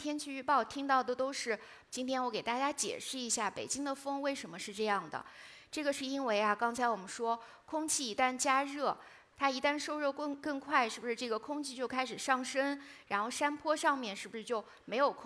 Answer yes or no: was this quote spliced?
yes